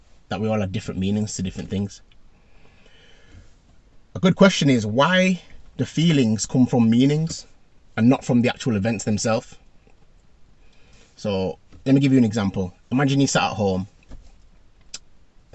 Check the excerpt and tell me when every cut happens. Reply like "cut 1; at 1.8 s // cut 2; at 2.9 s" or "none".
none